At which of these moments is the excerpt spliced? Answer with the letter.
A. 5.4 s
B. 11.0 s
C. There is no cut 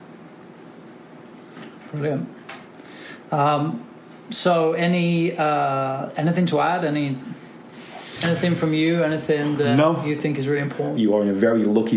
B